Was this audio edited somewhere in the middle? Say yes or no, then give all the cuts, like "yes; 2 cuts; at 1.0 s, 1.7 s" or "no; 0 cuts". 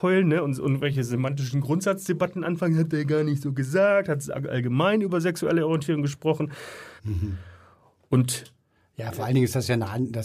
yes; 1 cut; at 7.0 s